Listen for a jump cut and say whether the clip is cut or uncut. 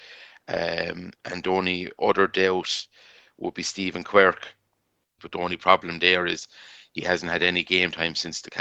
cut